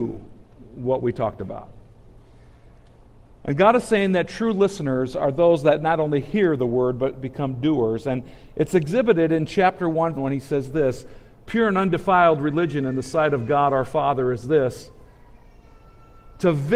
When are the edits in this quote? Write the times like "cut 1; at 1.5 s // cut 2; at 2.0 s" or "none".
cut 1; at 10.2 s

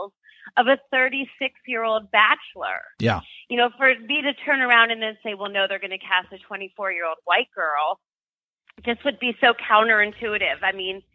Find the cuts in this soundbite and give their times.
none

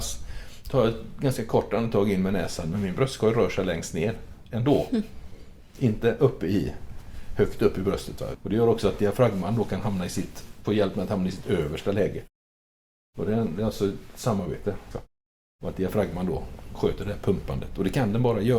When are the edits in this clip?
cut 1; at 8.3 s // cut 2; at 14.9 s

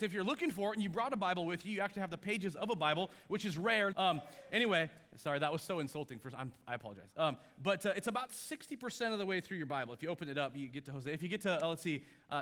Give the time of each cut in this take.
cut 1; at 3.9 s

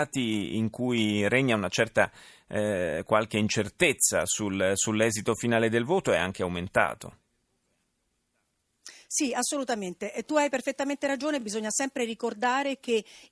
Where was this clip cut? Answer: none

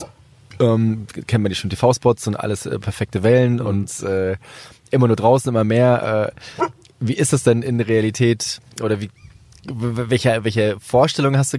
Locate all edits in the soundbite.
cut 1; at 2.8 s

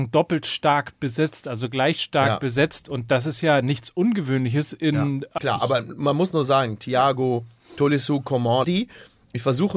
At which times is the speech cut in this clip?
cut 1; at 5.4 s // cut 2; at 8.6 s

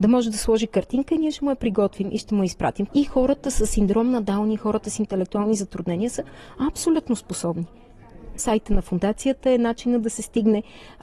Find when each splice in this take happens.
cut 1; at 2.9 s // cut 2; at 8.4 s

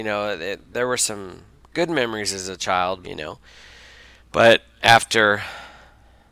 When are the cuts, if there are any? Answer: cut 1; at 3.0 s

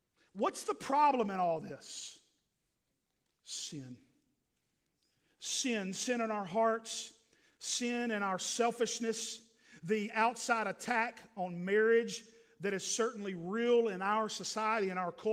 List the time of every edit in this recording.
none

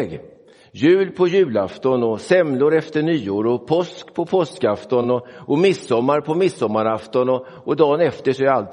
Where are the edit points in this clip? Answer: none

